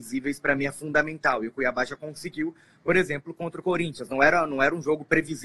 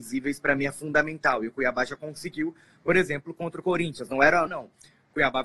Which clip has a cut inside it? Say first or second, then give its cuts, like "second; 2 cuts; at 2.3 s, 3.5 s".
second; 1 cut; at 4.5 s